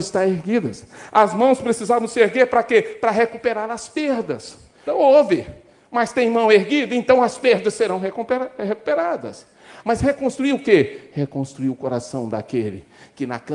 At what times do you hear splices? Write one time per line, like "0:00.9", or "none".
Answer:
0:04.9
0:09.8